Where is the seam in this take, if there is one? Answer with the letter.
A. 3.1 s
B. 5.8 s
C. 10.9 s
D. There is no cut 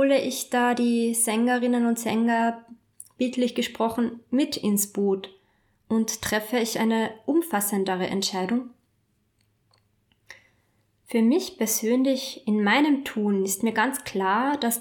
D